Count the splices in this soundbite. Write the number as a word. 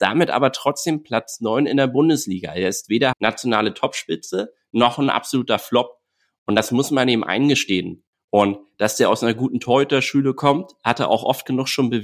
one